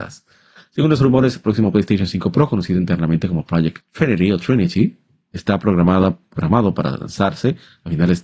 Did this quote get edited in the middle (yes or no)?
yes